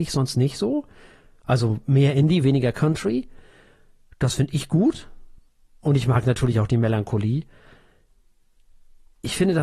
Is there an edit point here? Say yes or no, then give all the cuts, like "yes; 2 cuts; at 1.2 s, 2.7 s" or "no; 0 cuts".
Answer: no; 0 cuts